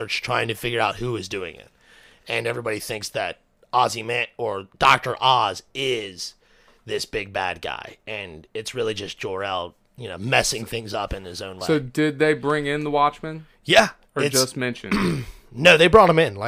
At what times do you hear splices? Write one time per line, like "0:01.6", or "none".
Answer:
none

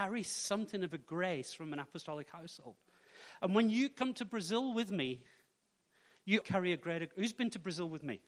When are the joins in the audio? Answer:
0:06.4

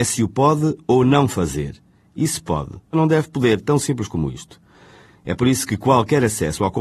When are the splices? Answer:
0:02.9

